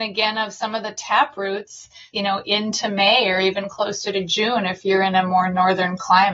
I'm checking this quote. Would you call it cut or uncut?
cut